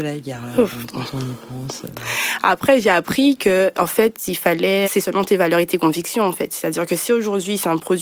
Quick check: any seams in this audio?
yes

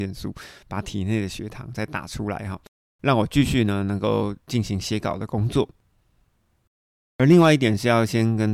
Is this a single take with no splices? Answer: yes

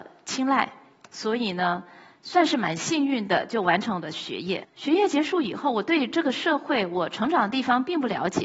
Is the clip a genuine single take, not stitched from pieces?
no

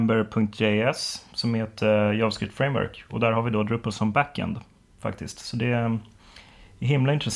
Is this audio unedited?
yes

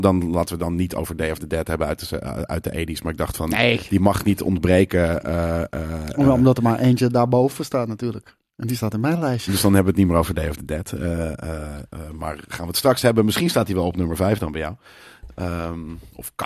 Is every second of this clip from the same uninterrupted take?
no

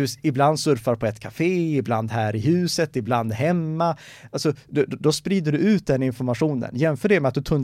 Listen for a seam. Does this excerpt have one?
no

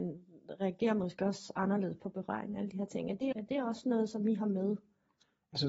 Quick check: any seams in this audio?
yes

